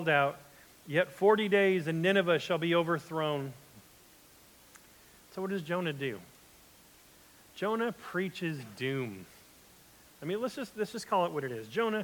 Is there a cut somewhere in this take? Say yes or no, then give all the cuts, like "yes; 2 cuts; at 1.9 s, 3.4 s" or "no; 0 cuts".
no; 0 cuts